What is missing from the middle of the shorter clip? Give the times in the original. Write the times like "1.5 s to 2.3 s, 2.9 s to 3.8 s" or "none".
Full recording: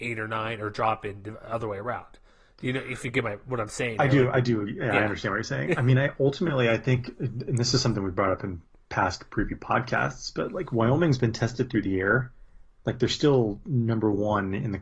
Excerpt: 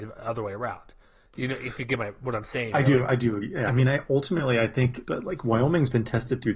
4.9 s to 5.8 s, 7.1 s to 10.3 s